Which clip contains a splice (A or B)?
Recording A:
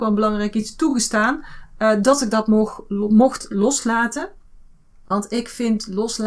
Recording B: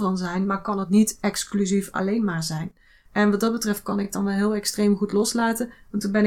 B